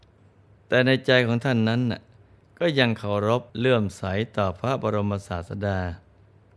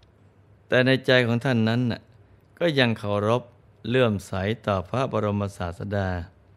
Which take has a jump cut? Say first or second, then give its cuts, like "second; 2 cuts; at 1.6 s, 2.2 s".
first; 1 cut; at 3.5 s